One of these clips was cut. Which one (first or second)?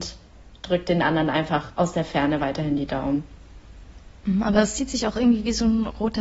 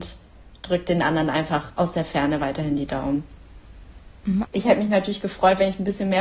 second